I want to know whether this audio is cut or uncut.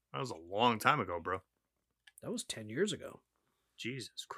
uncut